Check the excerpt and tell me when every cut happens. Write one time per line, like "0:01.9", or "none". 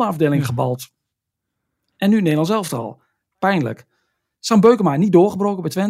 none